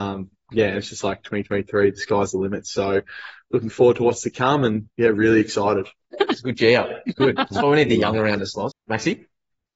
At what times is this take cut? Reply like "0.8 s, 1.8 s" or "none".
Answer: 4.9 s, 8.7 s